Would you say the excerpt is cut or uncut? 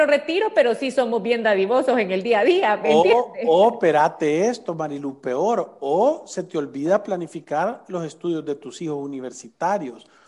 uncut